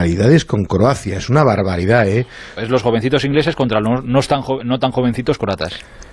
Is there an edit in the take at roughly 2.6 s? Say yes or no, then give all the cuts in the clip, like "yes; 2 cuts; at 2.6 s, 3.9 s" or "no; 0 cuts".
yes; 1 cut; at 2.6 s